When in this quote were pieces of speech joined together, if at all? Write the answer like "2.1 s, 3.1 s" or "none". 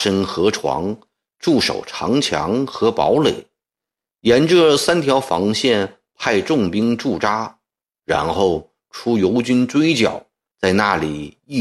10.5 s